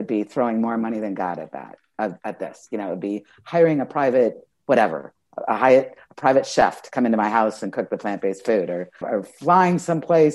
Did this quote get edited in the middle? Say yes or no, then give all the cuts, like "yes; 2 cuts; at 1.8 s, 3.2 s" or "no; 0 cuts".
yes; 1 cut; at 9.0 s